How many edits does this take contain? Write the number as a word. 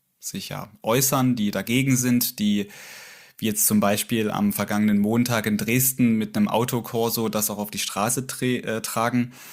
zero